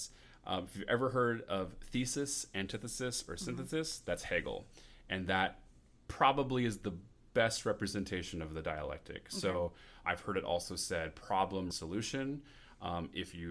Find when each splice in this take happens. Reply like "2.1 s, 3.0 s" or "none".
10.0 s, 11.7 s